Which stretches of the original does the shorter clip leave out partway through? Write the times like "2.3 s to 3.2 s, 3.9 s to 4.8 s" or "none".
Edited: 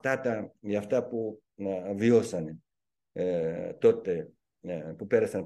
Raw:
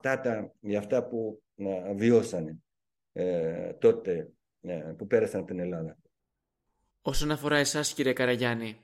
none